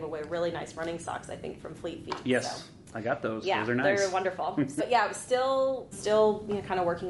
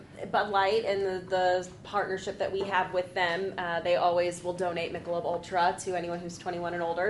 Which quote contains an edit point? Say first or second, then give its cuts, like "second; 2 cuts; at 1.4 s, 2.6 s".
first; 2 cuts; at 4.8 s, 5.9 s